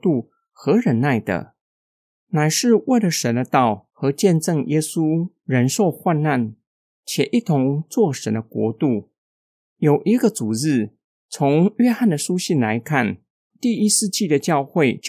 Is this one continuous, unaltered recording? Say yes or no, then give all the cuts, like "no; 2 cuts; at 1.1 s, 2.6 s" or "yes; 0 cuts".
yes; 0 cuts